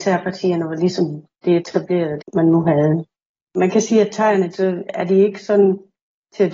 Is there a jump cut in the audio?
yes; 2 cuts; at 2.2 s, 4.5 s

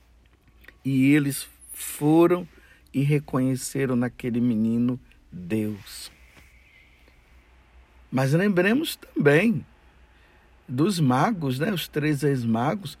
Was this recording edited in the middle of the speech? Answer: no; 0 cuts

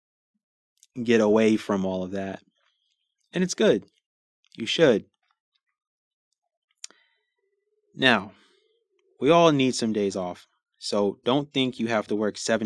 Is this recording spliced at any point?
no; 0 cuts

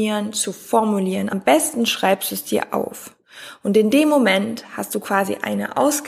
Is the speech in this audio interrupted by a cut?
no; 0 cuts

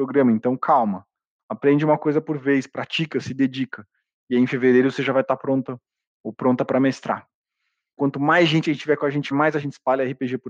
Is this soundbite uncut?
no; 2 cuts; at 8.0 s, 9.3 s

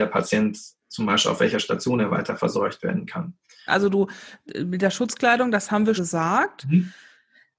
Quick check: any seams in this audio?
yes; 2 cuts; at 3.7 s, 6.0 s

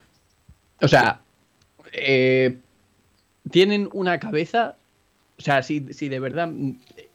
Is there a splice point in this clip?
no; 0 cuts

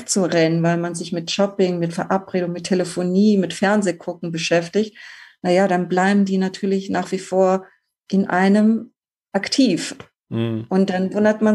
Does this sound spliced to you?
no; 0 cuts

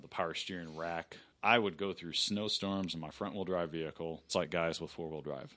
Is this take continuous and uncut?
no; 2 cuts; at 1.3 s, 4.3 s

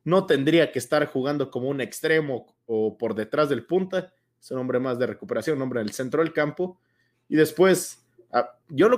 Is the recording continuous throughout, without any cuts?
yes; 0 cuts

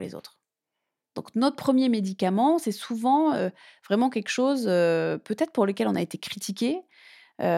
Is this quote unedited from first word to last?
yes; 0 cuts

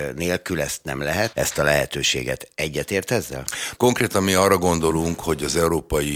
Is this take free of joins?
no; 2 cuts; at 1.3 s, 3.8 s

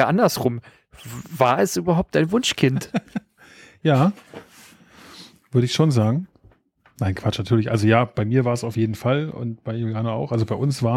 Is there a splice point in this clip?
no; 0 cuts

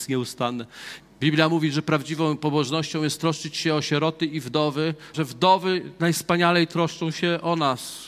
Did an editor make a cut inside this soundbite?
yes; 2 cuts; at 1.0 s, 5.1 s

